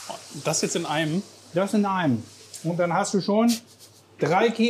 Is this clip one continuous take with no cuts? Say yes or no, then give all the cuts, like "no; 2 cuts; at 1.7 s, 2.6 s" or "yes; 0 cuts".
yes; 0 cuts